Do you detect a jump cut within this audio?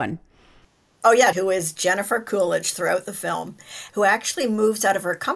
yes; 2 cuts; at 1.3 s, 3.9 s

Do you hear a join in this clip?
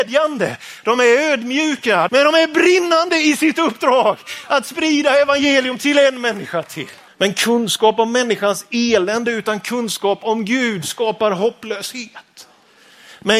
yes; 2 cuts; at 2.1 s, 7.1 s

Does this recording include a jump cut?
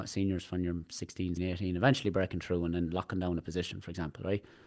yes; 1 cut; at 1.4 s

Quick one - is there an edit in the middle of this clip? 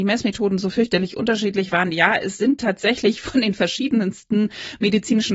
no; 0 cuts

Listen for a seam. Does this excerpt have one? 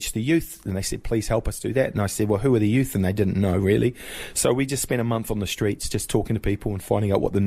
no; 0 cuts

